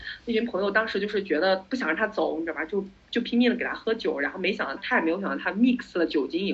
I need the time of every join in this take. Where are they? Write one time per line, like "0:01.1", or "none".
0:04.8